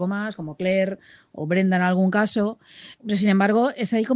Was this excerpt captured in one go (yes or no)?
no